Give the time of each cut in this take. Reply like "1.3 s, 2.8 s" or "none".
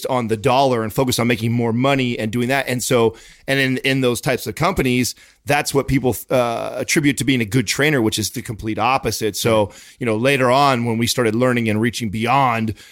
none